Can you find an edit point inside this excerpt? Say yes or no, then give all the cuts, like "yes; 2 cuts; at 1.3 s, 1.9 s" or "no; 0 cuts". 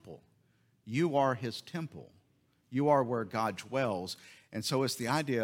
no; 0 cuts